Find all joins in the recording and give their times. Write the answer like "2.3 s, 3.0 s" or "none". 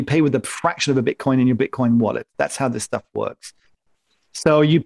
none